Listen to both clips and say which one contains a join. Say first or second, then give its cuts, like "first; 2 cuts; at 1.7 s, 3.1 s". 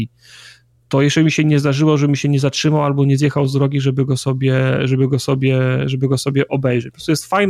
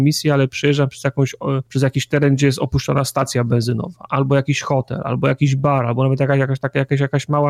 second; 1 cut; at 1.7 s